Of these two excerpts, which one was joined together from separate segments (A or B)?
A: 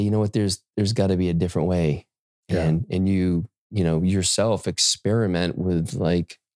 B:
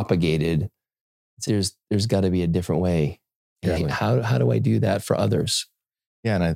B